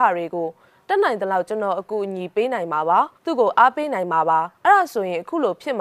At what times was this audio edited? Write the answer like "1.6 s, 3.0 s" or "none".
3.2 s, 4.5 s